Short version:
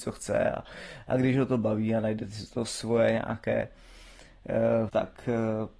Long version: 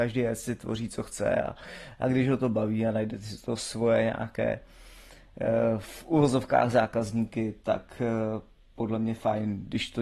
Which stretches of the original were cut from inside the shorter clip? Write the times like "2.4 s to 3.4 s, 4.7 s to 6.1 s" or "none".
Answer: 5.8 s to 7.6 s